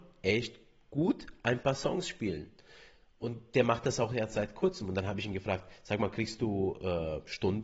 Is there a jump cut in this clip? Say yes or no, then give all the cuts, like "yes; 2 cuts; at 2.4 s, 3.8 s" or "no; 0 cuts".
no; 0 cuts